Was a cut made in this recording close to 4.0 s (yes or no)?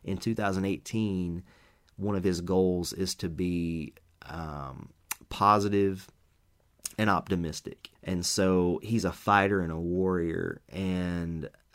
no